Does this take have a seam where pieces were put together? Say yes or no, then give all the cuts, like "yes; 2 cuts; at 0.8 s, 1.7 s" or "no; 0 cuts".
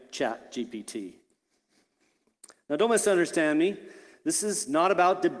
no; 0 cuts